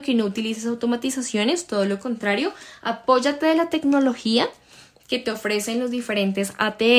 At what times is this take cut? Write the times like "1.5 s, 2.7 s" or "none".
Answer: none